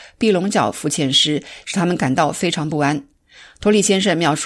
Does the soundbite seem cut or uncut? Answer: cut